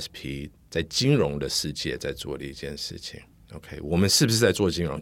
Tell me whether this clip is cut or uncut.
uncut